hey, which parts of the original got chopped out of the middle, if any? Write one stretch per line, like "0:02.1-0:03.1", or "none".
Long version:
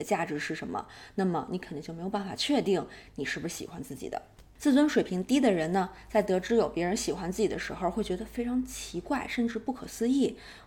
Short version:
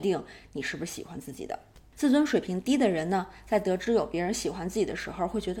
none